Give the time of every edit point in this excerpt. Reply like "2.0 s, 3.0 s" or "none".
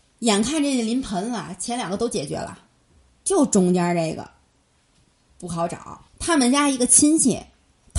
6.1 s